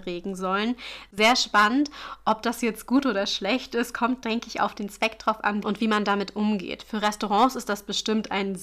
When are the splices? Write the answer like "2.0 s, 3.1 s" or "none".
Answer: 5.6 s